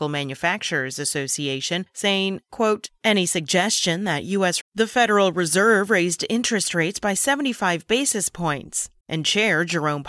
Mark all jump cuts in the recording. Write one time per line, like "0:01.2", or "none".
0:04.6
0:09.0